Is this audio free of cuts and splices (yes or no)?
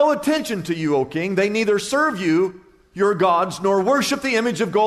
yes